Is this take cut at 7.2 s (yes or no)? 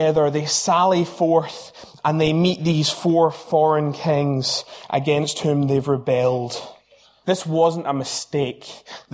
yes